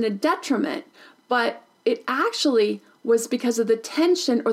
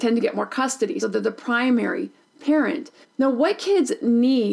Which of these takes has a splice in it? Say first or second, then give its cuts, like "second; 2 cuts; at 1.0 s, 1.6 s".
second; 2 cuts; at 1.0 s, 3.0 s